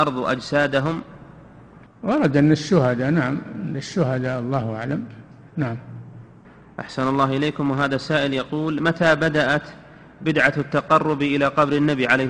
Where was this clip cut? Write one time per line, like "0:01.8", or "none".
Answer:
none